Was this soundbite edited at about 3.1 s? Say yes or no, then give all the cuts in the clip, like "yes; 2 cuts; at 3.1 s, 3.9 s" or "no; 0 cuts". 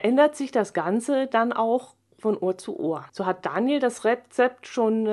yes; 1 cut; at 3.1 s